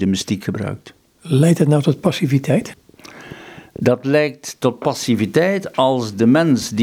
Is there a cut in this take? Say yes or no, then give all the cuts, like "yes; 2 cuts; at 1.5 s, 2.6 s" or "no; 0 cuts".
no; 0 cuts